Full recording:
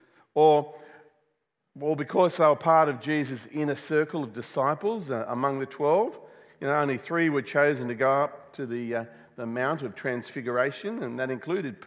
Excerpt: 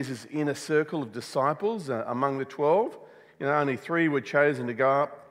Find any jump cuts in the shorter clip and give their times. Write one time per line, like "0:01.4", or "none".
none